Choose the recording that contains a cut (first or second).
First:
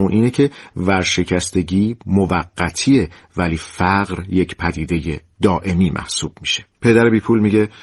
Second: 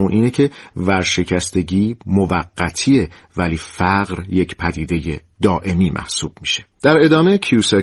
first